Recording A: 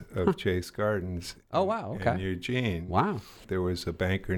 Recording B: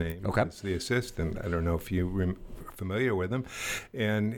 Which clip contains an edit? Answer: A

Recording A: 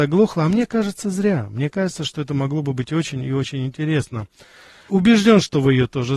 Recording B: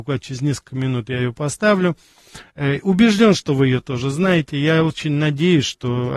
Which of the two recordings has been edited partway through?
A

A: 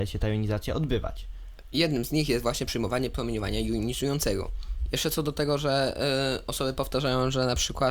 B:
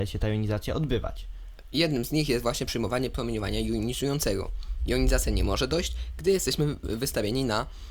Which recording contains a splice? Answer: A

